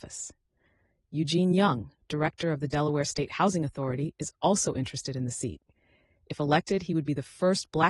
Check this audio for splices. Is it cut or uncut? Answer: uncut